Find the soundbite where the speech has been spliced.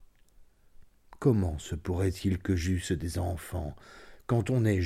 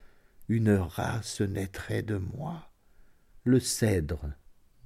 second; 1 cut; at 3.3 s

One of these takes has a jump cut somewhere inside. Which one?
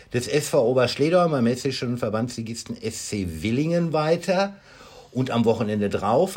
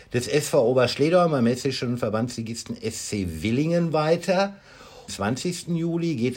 second; 1 cut; at 5.1 s

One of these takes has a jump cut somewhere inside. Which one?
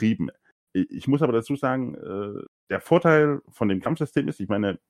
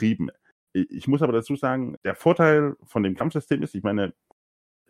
second; 1 cut; at 2.0 s

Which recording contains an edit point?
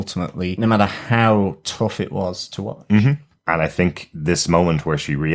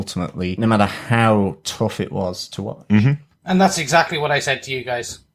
first; 1 cut; at 3.4 s

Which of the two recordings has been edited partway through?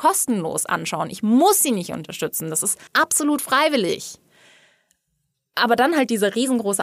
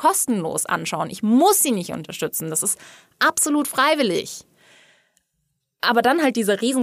first; 1 cut; at 2.9 s

